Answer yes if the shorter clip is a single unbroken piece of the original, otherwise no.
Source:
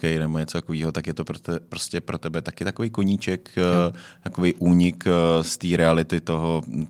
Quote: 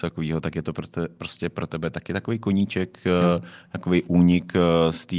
yes